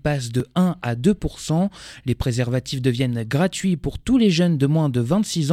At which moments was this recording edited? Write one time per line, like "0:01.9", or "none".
none